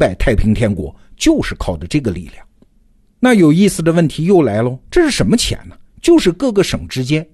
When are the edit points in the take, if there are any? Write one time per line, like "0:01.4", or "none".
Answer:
0:04.9